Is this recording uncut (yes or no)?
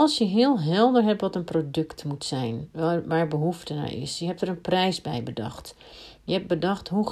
yes